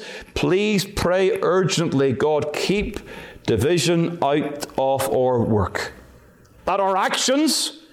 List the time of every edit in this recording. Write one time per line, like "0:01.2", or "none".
0:06.6